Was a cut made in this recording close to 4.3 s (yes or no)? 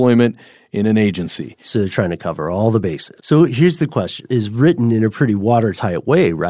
yes